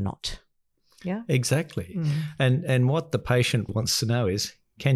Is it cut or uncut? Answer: cut